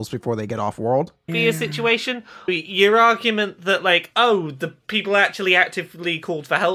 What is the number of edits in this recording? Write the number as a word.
two